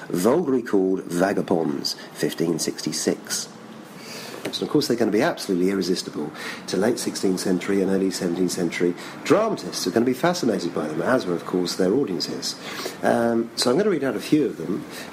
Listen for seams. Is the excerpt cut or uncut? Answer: cut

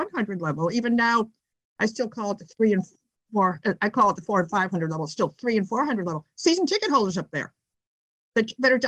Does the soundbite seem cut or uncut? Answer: uncut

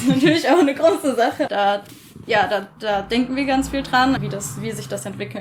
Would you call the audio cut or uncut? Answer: cut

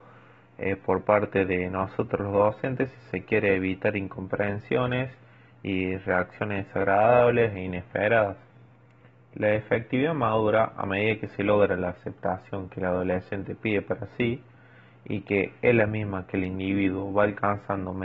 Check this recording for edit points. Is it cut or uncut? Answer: uncut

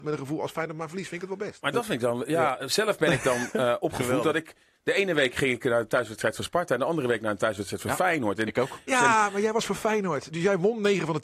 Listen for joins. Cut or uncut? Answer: cut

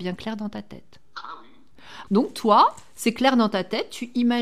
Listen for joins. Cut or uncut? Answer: cut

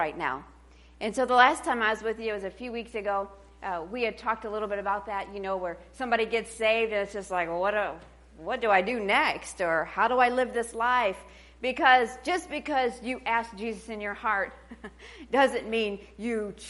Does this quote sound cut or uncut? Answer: uncut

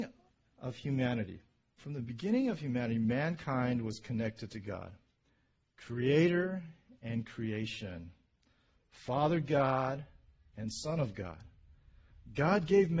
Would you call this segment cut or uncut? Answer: cut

